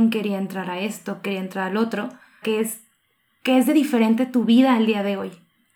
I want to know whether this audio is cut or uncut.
cut